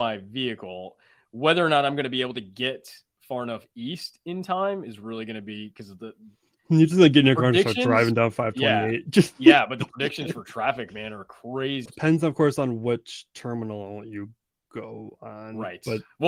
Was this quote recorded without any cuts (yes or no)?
no